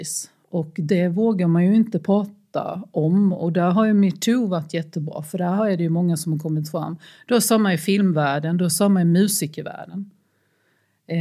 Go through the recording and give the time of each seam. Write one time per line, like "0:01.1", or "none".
none